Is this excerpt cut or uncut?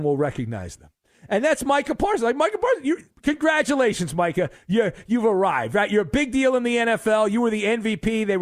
uncut